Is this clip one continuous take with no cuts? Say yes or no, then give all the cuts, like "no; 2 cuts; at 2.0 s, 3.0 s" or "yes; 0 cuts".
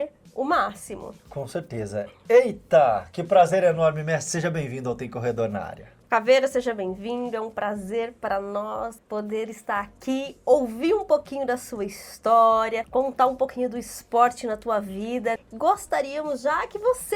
yes; 0 cuts